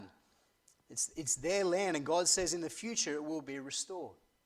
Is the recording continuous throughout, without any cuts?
yes; 0 cuts

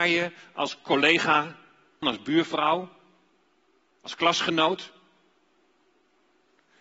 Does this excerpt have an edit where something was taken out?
yes; 1 cut; at 2.0 s

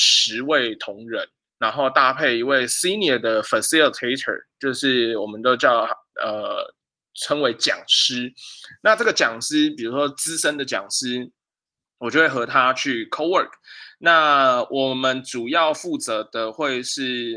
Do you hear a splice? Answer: yes; 1 cut; at 1.5 s

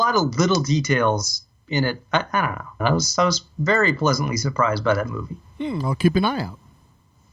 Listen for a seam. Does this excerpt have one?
yes; 1 cut; at 2.8 s

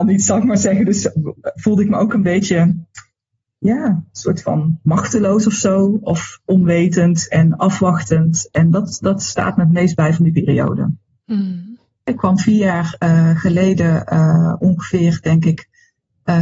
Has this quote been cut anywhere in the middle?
no; 0 cuts

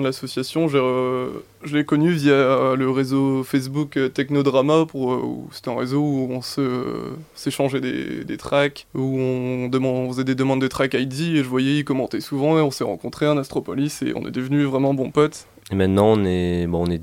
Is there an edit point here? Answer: yes; 1 cut; at 15.6 s

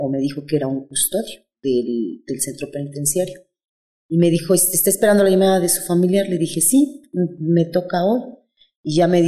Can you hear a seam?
no; 0 cuts

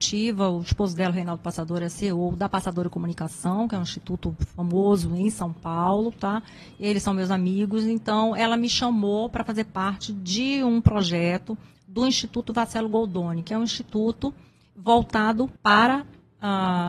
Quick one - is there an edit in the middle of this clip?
yes; 1 cut; at 15.6 s

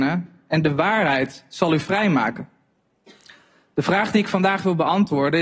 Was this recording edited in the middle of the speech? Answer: no; 0 cuts

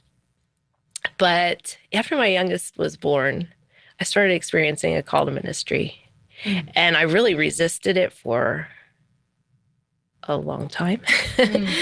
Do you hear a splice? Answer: no; 0 cuts

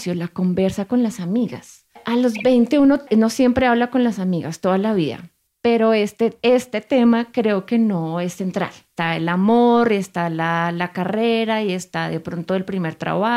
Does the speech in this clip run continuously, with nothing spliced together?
yes; 0 cuts

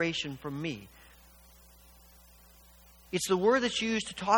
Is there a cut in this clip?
yes; 1 cut; at 3.1 s

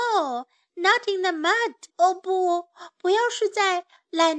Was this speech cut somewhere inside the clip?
yes; 1 cut; at 1.9 s

